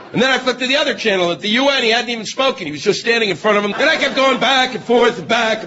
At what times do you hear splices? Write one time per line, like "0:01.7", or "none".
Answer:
0:03.7